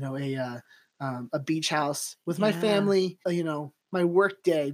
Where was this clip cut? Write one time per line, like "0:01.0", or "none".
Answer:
0:03.2